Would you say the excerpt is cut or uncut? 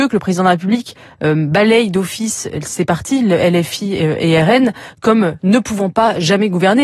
uncut